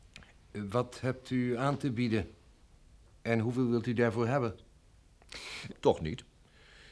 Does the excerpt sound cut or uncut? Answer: cut